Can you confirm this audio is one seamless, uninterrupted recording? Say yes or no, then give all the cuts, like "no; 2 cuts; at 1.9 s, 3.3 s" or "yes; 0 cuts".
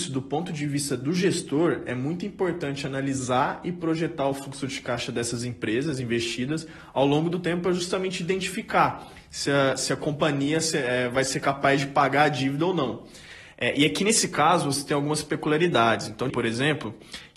no; 2 cuts; at 13.5 s, 16.3 s